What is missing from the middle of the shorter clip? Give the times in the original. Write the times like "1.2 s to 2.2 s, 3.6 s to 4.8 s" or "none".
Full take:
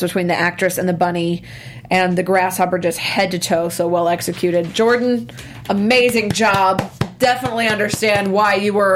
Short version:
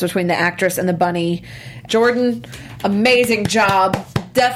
1.9 s to 4.7 s